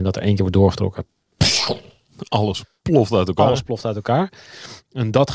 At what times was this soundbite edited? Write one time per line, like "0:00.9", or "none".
none